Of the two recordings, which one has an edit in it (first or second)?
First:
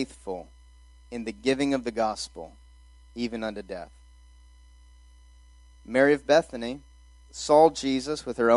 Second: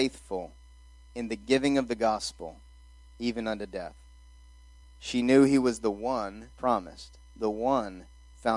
second